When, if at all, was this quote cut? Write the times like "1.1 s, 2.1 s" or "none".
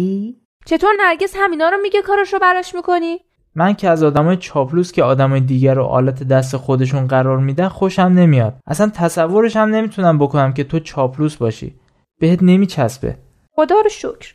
3.4 s, 8.6 s